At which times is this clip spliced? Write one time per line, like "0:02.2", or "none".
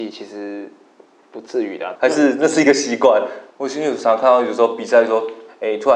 0:02.0
0:03.5